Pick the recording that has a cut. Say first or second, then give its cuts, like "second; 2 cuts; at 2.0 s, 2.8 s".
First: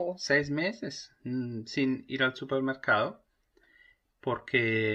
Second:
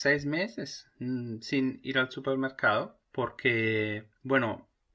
second; 1 cut; at 3.0 s